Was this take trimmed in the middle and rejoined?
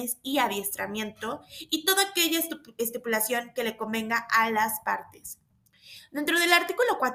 no; 0 cuts

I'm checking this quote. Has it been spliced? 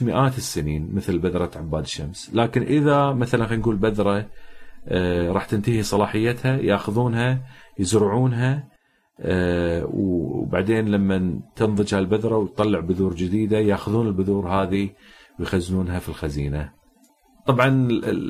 no; 0 cuts

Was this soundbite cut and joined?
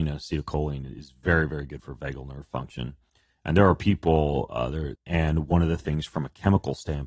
yes; 1 cut; at 4.9 s

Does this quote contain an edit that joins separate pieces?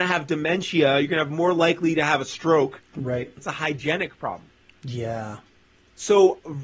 yes; 1 cut; at 3.4 s

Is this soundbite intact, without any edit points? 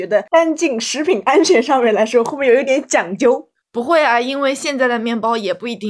no; 1 cut; at 2.6 s

